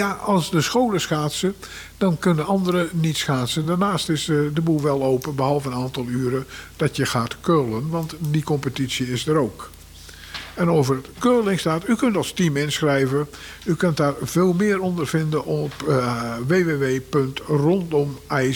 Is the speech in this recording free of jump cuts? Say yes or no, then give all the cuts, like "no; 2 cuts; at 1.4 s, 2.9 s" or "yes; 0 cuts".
yes; 0 cuts